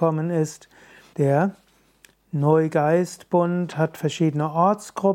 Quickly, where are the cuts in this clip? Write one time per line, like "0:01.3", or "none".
0:01.1